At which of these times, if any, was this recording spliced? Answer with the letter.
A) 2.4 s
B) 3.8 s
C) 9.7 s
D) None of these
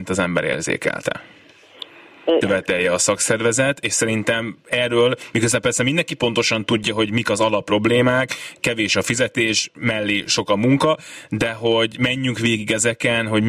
A